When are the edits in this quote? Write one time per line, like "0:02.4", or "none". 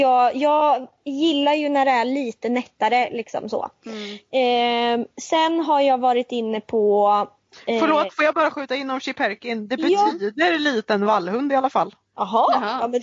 none